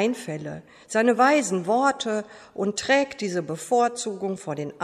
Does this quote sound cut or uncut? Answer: uncut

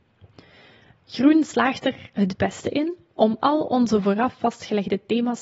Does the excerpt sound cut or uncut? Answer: uncut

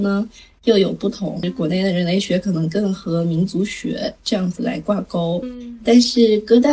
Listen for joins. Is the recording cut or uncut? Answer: uncut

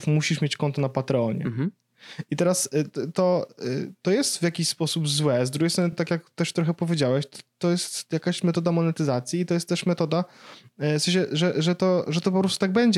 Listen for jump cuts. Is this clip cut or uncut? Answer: uncut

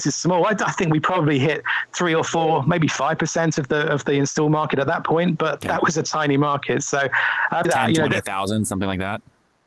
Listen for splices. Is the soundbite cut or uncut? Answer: cut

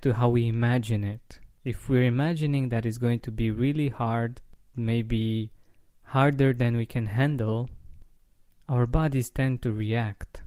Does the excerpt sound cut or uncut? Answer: cut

